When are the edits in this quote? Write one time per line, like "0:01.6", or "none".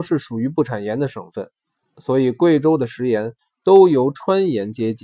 none